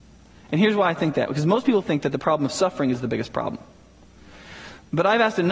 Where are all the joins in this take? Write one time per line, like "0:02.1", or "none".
none